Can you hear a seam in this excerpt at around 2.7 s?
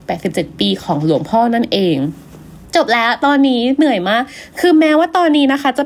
yes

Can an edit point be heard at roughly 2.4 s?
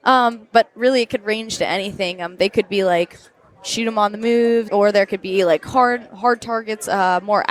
no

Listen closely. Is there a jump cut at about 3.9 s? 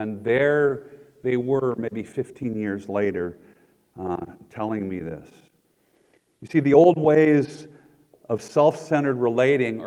no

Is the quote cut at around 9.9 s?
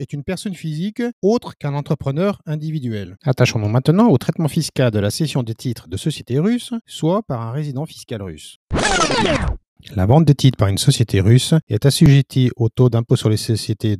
no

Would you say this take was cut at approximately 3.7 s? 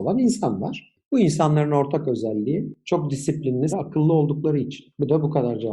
yes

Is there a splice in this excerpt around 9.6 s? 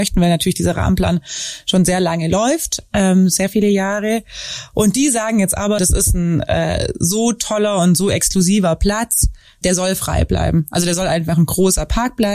yes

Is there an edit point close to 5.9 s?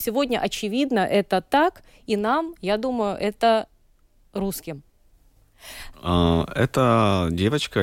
yes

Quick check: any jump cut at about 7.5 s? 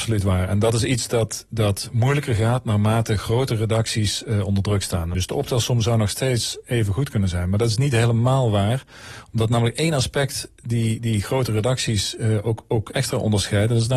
no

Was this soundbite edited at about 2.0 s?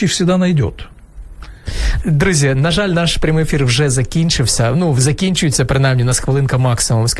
yes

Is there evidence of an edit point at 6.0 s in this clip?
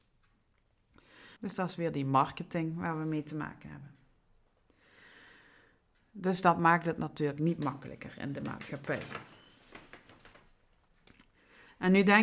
no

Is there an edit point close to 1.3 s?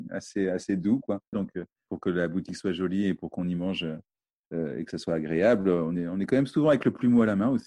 yes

